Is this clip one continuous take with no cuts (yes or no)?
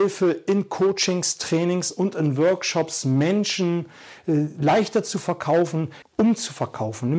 no